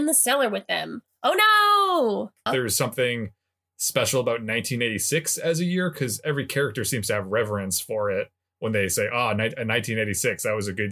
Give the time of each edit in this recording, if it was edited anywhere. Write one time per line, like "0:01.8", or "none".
0:02.5